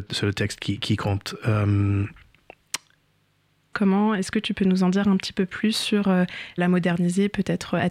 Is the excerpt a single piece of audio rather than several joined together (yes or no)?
no